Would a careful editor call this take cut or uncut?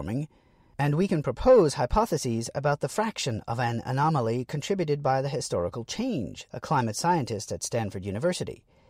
cut